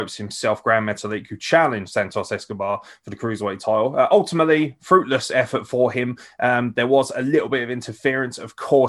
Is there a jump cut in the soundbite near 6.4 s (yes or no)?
no